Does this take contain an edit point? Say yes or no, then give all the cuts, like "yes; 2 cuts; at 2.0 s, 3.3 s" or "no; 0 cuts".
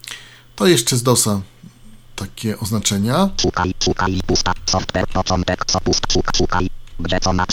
no; 0 cuts